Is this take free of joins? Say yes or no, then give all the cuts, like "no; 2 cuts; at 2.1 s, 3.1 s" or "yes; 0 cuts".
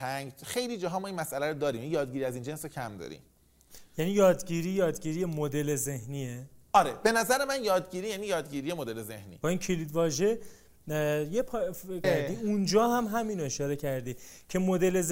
no; 1 cut; at 12.0 s